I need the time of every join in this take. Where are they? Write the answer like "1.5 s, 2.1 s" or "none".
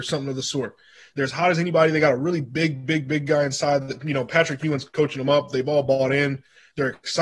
none